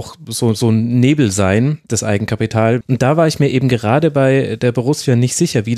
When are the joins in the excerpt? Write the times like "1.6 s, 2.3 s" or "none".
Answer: 2.8 s